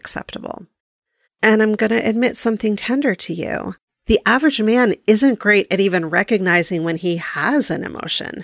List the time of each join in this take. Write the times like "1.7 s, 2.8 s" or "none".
1.2 s, 3.9 s